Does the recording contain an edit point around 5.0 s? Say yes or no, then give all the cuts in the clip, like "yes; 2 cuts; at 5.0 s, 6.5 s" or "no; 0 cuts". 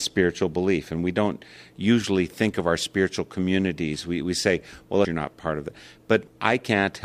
yes; 1 cut; at 5.0 s